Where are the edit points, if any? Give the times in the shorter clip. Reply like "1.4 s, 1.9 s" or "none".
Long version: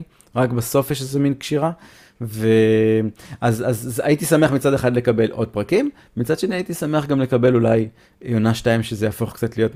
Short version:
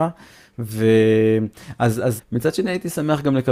2.2 s